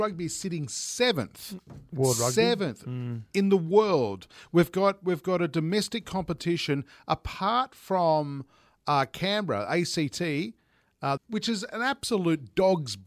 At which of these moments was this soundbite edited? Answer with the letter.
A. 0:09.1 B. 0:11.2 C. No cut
B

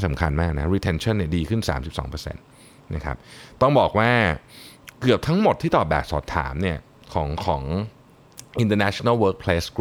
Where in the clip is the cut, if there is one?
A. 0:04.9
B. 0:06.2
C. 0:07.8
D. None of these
A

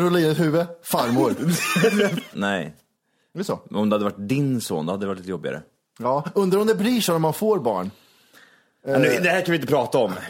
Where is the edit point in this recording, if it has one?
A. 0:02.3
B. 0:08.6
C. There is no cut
A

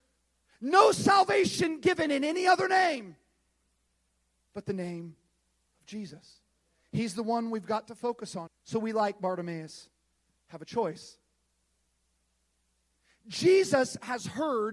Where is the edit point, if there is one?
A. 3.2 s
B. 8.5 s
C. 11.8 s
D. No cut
B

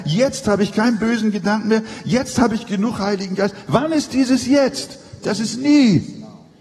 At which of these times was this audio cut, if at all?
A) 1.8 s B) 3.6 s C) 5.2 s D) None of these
D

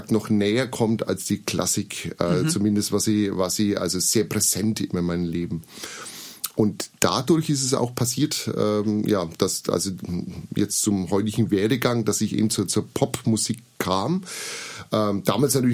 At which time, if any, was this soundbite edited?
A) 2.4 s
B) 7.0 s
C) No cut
B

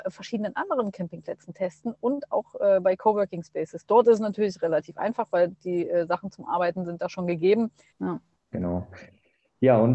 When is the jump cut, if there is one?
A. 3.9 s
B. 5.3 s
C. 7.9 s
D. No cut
C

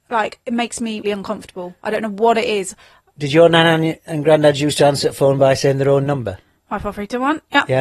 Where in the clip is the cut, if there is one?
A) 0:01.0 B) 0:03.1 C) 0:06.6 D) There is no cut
A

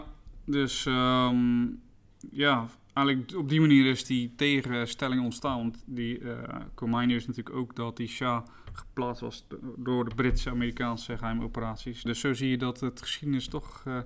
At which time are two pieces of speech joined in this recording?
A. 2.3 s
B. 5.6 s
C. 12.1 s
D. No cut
C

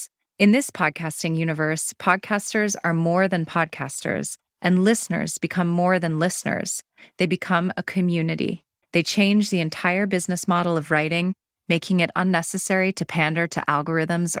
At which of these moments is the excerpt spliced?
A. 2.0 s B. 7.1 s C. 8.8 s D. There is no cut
C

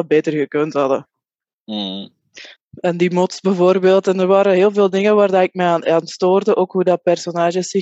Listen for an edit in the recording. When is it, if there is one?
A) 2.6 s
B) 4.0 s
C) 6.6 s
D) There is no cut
A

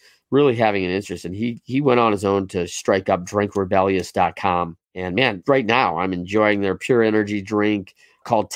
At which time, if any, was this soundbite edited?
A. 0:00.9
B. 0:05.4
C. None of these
B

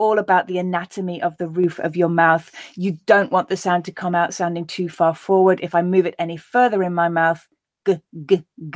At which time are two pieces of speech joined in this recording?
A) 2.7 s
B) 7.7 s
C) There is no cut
C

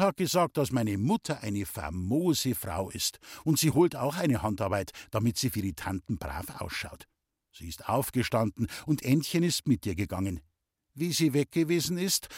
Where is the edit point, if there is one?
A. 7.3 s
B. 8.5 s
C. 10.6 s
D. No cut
D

